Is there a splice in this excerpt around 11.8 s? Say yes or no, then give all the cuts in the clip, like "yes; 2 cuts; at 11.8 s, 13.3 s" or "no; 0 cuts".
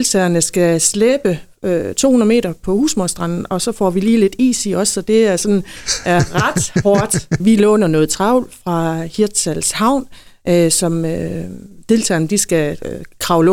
no; 1 cut; at 7.4 s